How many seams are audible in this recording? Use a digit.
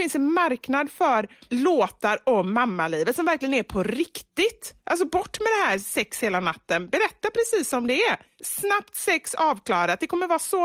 0